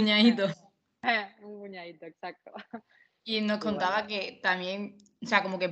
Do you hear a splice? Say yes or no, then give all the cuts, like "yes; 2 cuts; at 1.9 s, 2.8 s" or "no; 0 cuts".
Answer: yes; 1 cut; at 3.2 s